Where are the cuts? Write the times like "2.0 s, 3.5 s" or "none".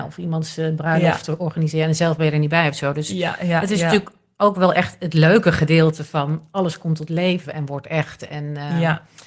none